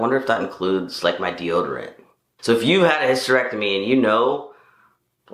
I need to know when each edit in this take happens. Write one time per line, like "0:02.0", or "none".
0:02.4